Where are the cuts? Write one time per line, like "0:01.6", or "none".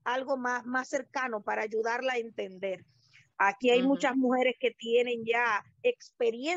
none